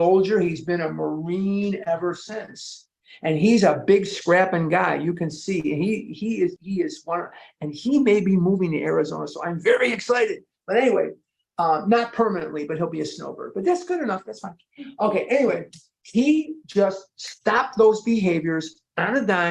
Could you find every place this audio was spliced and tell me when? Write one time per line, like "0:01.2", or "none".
0:06.6